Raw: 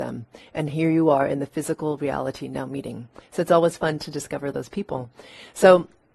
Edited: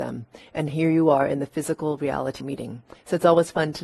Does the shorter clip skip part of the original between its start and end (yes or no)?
yes